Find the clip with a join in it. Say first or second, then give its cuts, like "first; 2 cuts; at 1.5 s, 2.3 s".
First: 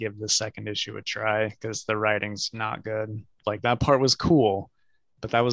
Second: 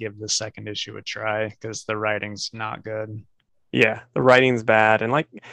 first; 1 cut; at 3.4 s